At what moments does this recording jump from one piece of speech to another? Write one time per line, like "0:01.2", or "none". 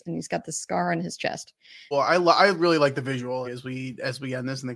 0:01.9
0:03.4